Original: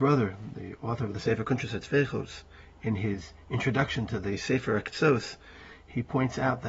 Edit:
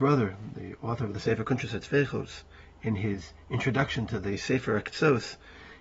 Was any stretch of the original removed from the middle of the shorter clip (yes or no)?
no